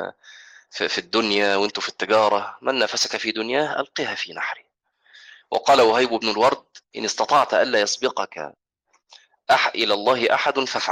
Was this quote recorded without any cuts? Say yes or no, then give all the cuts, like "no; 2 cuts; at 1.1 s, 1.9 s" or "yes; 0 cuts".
yes; 0 cuts